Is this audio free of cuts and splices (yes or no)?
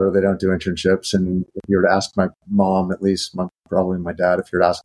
yes